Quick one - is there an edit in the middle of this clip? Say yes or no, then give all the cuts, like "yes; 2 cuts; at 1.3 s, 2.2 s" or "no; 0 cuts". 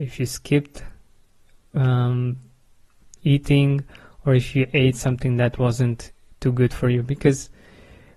no; 0 cuts